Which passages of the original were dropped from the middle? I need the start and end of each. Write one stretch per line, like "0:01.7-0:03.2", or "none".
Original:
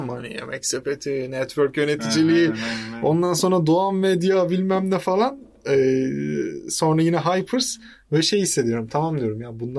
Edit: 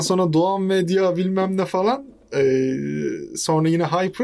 none

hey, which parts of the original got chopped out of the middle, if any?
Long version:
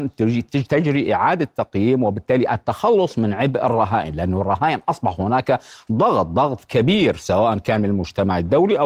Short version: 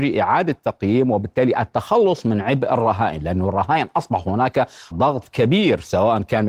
0:05.8-0:06.3

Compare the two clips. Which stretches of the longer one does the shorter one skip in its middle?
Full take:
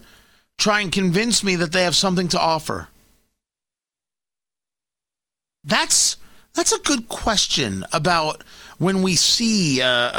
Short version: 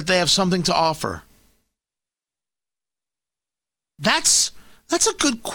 none

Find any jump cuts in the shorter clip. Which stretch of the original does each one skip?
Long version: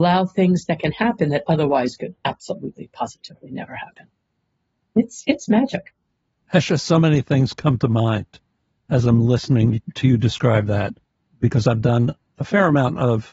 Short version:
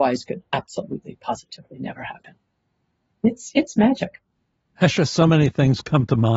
none

